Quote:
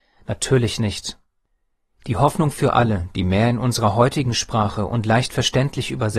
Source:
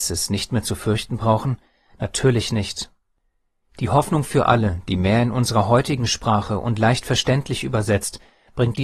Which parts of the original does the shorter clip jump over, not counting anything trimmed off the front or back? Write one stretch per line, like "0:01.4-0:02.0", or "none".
none